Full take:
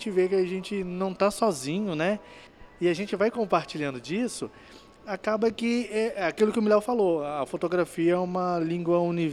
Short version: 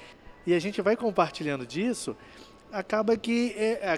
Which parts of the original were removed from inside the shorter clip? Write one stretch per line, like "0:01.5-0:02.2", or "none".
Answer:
none